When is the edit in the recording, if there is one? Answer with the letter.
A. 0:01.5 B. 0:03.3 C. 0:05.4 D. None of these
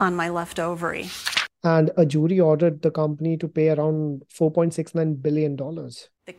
A